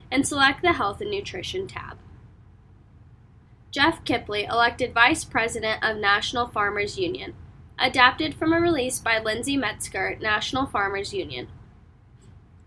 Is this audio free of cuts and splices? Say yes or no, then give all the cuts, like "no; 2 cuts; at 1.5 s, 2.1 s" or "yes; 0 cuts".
yes; 0 cuts